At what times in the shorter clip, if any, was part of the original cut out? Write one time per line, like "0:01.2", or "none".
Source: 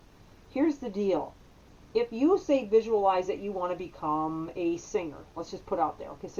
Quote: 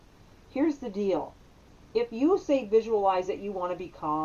none